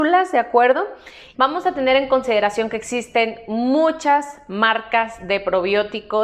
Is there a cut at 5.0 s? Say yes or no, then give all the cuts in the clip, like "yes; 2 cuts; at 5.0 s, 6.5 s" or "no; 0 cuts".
no; 1 cut; at 1.3 s